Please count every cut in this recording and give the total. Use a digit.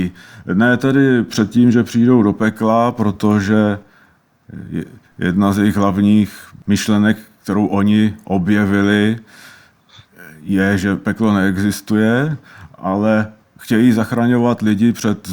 0